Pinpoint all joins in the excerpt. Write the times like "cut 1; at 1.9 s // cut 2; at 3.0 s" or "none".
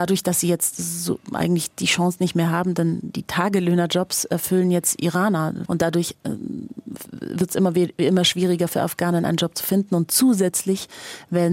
cut 1; at 5.6 s